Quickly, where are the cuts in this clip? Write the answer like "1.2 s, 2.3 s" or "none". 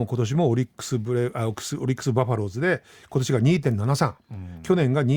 none